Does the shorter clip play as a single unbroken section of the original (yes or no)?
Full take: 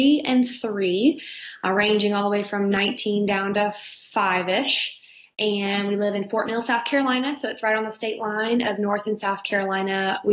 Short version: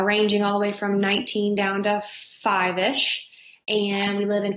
yes